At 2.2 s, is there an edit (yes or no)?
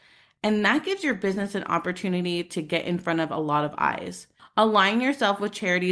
no